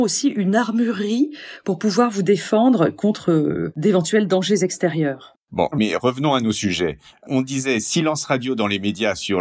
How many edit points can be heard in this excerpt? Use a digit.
1